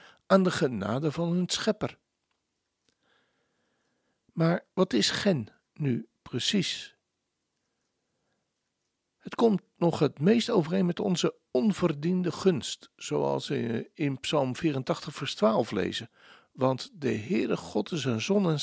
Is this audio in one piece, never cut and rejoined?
yes; 0 cuts

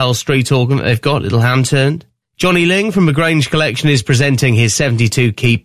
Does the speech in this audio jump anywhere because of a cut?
yes; 1 cut; at 2.2 s

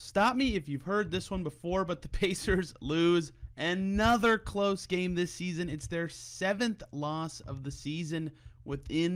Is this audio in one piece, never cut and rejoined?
yes; 0 cuts

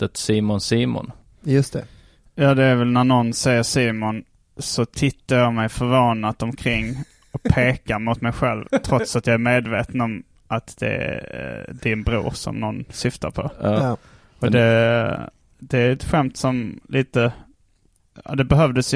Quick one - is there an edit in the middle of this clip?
no; 0 cuts

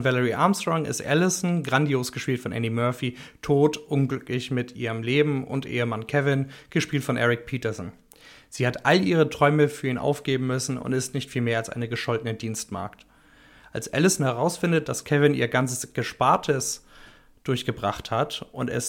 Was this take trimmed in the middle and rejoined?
no; 0 cuts

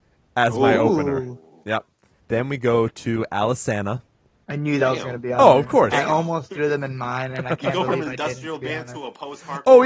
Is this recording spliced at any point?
yes; 1 cut; at 2.2 s

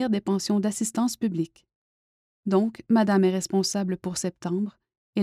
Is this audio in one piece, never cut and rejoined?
yes; 0 cuts

